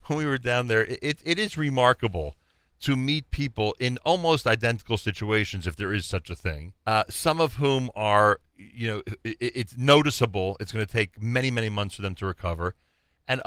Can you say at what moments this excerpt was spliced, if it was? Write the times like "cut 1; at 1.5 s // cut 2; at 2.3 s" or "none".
cut 1; at 6.8 s